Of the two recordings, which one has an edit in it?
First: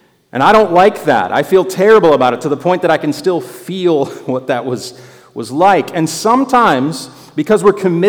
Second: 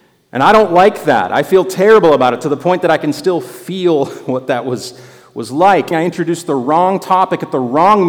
second; 1 cut; at 5.9 s

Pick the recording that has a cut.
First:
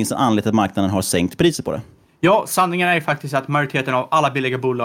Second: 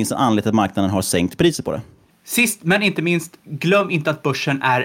second; 1 cut; at 2.1 s

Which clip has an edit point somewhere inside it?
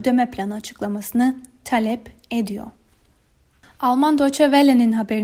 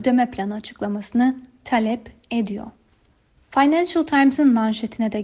second; 1 cut; at 3.4 s

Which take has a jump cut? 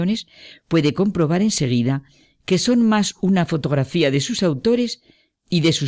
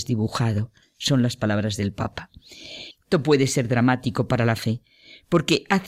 second; 1 cut; at 2.9 s

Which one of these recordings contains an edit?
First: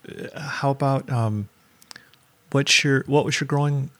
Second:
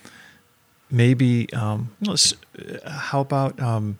second; 1 cut; at 1.9 s

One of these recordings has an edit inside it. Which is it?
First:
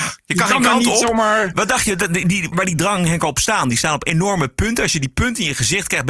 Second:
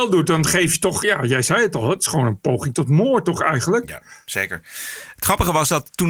first; 1 cut; at 2.5 s

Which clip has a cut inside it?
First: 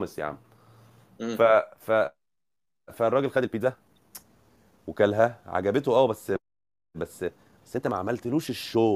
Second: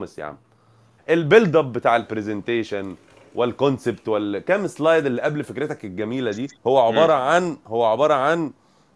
second; 2 cuts; at 1.0 s, 6.6 s

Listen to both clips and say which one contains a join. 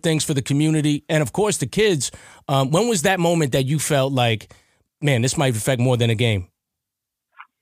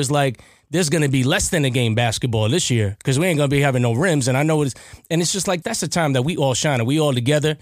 second; 1 cut; at 5.6 s

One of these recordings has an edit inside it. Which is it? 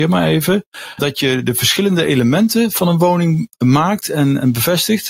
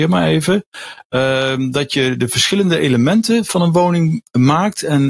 first; 1 cut; at 1.0 s

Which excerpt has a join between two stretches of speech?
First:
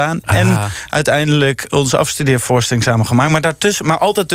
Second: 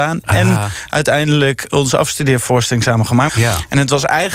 second; 1 cut; at 3.3 s

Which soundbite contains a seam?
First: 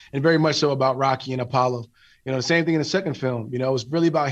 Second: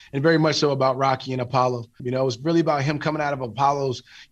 second; 1 cut; at 2.0 s

